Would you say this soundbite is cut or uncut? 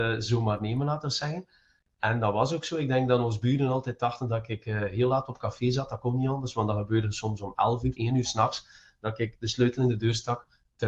cut